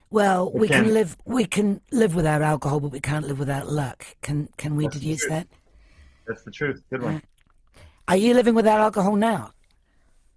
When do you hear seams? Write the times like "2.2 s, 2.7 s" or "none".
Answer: none